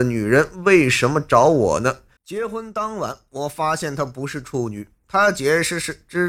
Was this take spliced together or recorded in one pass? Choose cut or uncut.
cut